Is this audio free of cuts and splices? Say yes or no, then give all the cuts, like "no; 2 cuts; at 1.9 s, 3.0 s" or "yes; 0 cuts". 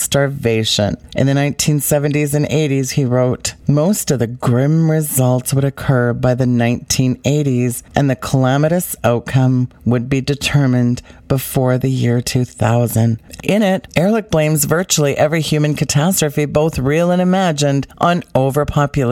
no; 2 cuts; at 1.1 s, 13.4 s